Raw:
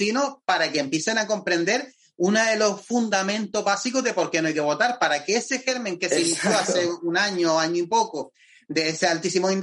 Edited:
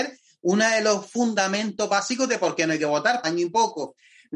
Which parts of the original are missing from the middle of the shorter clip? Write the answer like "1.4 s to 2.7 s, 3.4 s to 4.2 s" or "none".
5.0 s to 7.6 s